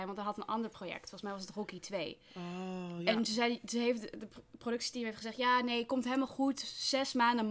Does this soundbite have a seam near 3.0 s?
no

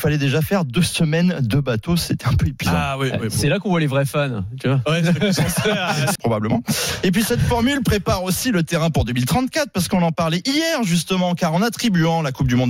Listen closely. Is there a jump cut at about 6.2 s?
yes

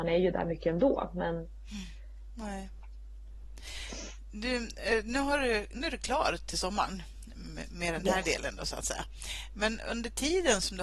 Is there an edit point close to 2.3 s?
yes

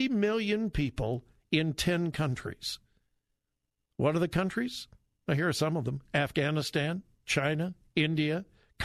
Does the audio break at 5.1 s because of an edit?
no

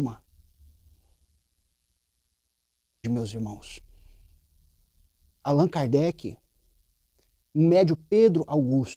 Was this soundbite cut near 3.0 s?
yes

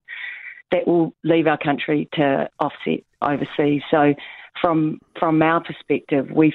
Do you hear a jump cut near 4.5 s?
no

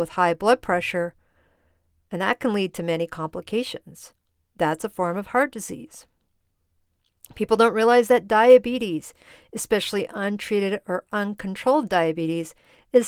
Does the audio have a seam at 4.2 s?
no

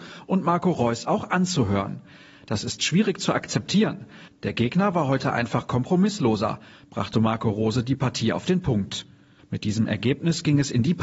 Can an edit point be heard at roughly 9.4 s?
yes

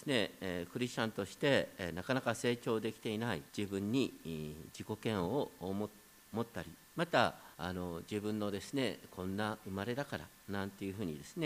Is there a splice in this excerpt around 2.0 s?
no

